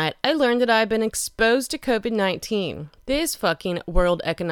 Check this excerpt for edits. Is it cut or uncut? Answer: cut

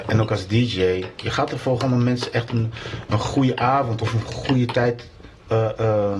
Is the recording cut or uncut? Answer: cut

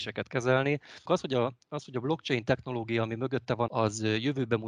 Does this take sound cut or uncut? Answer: cut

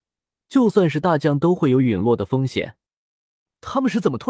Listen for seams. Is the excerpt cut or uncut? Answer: uncut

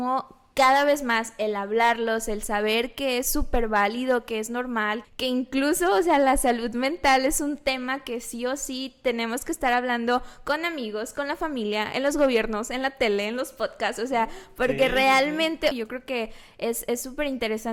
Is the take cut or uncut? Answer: cut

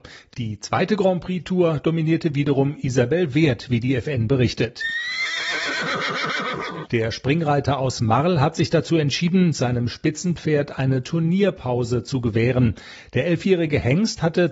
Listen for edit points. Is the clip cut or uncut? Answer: cut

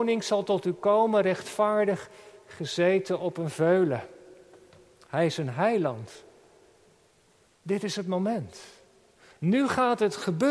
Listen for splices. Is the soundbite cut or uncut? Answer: uncut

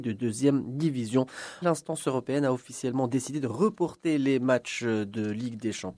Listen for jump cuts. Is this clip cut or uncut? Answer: cut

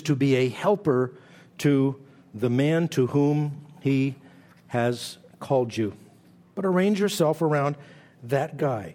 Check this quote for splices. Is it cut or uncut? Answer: cut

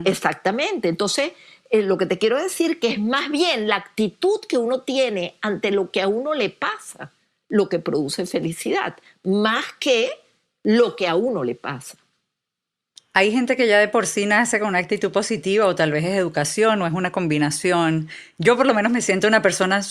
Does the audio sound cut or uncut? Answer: uncut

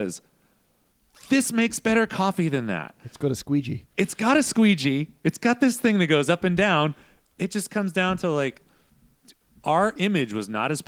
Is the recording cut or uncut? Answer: uncut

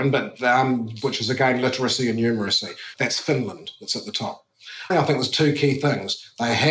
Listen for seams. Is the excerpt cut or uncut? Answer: cut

